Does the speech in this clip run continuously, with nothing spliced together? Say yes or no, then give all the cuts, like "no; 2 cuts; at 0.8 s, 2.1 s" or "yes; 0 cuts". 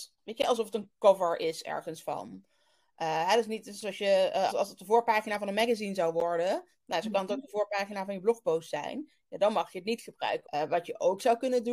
no; 2 cuts; at 4.5 s, 10.4 s